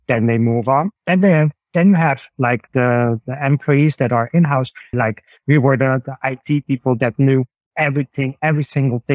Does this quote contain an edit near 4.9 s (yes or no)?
yes